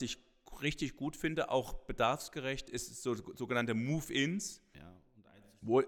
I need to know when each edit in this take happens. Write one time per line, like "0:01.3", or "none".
0:04.7